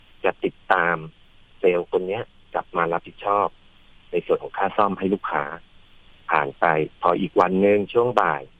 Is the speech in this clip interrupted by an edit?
no; 0 cuts

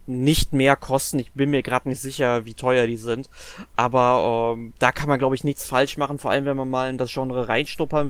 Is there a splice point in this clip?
no; 0 cuts

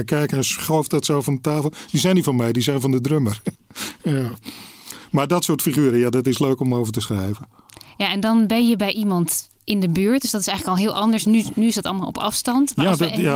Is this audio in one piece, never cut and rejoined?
no; 1 cut; at 3.6 s

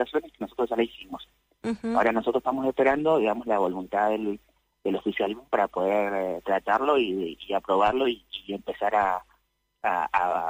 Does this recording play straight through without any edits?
yes; 0 cuts

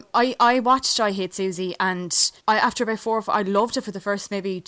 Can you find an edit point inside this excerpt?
yes; 1 cut; at 2.4 s

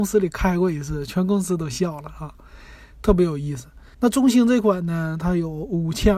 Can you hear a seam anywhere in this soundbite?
yes; 1 cut; at 3.9 s

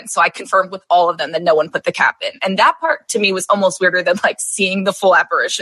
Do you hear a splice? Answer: no; 0 cuts

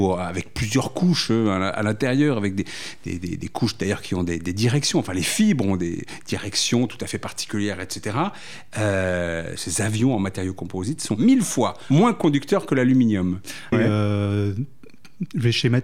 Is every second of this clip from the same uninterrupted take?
no; 2 cuts; at 9.6 s, 13.7 s

